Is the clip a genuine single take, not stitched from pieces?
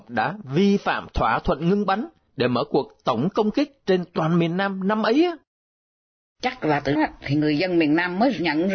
no; 1 cut; at 7.0 s

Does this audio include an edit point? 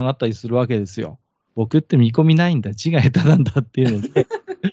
yes; 1 cut; at 1.5 s

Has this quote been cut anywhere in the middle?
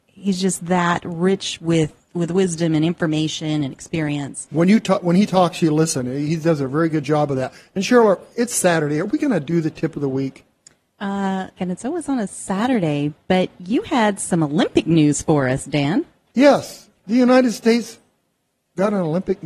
yes; 1 cut; at 11.6 s

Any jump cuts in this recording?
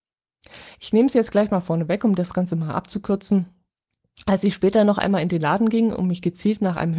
no; 0 cuts

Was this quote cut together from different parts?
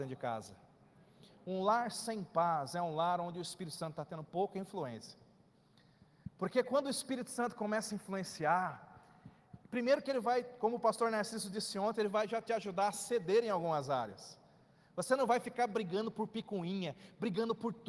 no; 0 cuts

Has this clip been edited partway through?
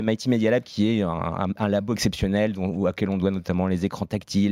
no; 0 cuts

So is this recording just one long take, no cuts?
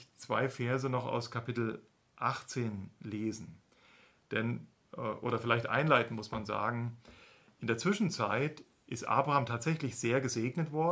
yes; 0 cuts

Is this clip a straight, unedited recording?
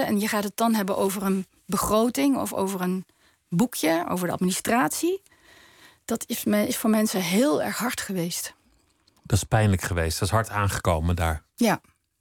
yes; 0 cuts

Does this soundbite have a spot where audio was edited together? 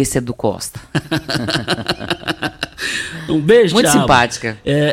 no; 0 cuts

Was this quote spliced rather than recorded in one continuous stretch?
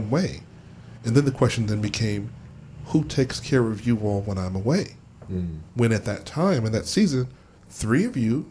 no; 0 cuts

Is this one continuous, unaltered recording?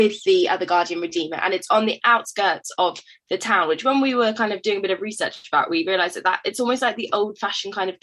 yes; 0 cuts

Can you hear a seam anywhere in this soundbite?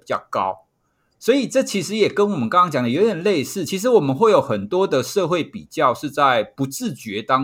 no; 0 cuts

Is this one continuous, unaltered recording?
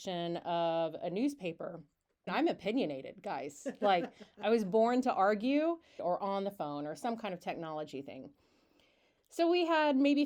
no; 2 cuts; at 2.3 s, 6.0 s

